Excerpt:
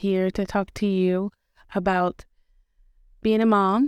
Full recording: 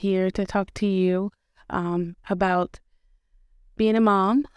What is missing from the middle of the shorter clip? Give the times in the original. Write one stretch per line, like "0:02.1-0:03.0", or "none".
0:01.6-0:02.2